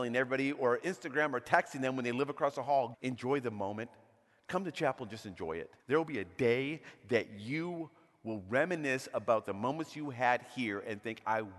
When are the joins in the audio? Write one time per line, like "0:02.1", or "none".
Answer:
0:02.9
0:05.8